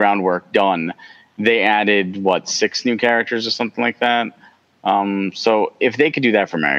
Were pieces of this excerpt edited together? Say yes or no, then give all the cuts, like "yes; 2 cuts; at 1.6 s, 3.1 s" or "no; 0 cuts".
no; 0 cuts